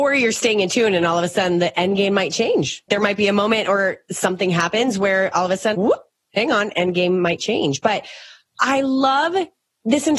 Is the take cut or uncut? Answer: cut